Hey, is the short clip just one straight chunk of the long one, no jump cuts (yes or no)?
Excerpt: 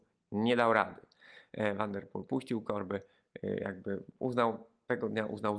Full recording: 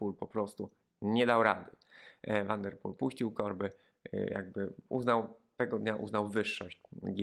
yes